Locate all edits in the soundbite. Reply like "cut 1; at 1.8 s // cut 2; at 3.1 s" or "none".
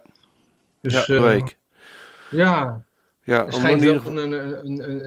cut 1; at 1.2 s